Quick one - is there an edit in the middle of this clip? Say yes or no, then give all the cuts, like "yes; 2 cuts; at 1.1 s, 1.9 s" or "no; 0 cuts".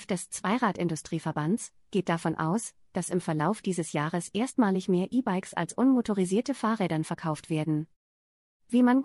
no; 0 cuts